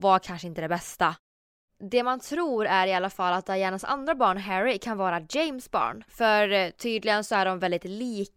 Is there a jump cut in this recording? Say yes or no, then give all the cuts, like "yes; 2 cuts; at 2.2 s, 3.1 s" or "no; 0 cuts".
no; 0 cuts